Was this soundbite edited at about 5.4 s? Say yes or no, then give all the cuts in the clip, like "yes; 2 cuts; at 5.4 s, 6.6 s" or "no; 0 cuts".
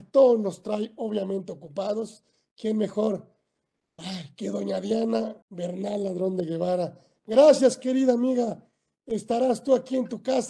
yes; 1 cut; at 5.4 s